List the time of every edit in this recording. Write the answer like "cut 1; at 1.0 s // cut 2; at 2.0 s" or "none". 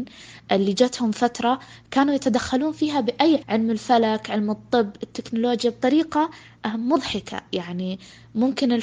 cut 1; at 3.4 s